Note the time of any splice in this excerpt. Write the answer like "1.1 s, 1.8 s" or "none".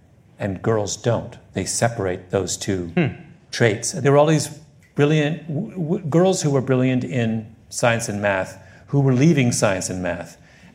none